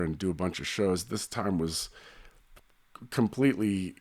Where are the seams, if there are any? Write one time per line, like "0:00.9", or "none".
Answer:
none